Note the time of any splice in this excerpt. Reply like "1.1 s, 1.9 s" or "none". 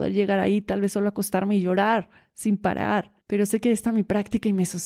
3.2 s